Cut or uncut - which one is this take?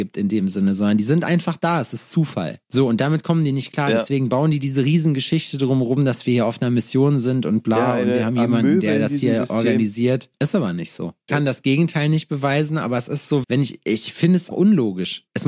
cut